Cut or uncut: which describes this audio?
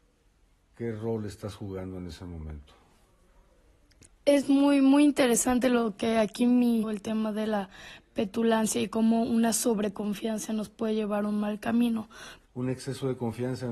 cut